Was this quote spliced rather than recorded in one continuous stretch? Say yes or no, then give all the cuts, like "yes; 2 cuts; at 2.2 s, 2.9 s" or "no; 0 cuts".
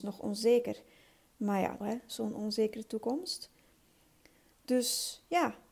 yes; 2 cuts; at 1.8 s, 4.5 s